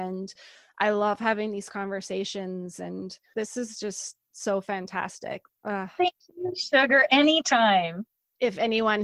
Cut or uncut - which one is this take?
cut